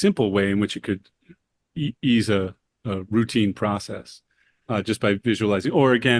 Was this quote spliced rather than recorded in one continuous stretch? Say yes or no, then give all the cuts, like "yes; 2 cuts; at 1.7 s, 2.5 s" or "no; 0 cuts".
no; 0 cuts